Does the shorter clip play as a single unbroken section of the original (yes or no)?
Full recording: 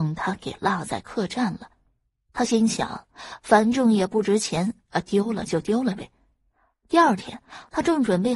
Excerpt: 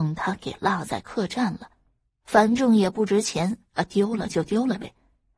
no